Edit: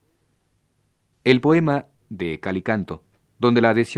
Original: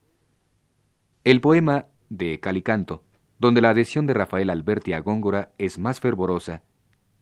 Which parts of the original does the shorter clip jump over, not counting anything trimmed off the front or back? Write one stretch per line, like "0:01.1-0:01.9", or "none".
none